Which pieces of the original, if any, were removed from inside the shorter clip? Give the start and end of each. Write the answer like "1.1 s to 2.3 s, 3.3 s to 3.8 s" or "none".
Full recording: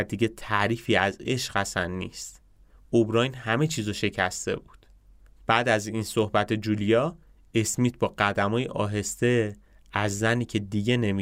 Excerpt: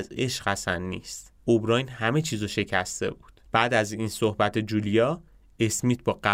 2.5 s to 2.8 s, 4.9 s to 5.4 s